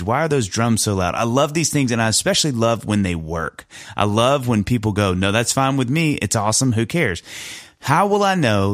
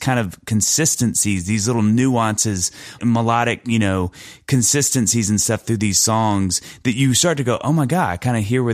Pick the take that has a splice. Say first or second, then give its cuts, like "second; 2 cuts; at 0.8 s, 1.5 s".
second; 1 cut; at 3.0 s